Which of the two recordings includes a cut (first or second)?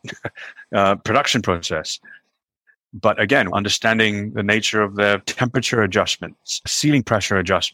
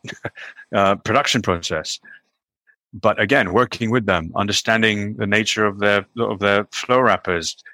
first